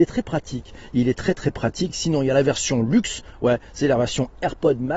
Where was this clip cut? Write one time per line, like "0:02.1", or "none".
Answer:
none